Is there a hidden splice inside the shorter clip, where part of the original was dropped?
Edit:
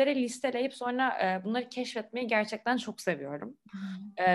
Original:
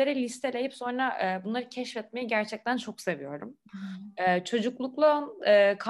no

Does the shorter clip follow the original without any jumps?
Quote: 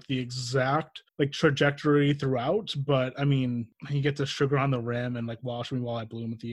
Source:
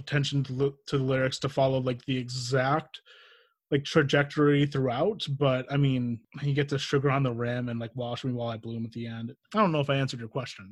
no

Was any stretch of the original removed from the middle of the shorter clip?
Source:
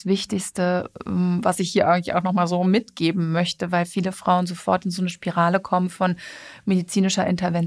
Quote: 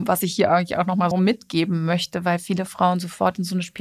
yes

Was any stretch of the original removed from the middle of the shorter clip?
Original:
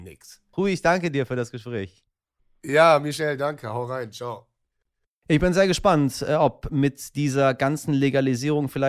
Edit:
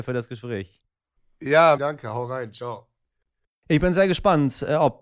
yes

